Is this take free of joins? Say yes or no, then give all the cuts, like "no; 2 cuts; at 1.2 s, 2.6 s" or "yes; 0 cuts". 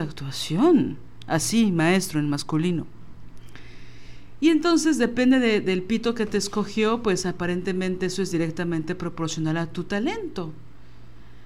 yes; 0 cuts